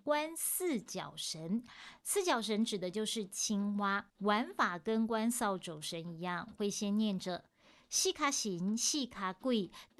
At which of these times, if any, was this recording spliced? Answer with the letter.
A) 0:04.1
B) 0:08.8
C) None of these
A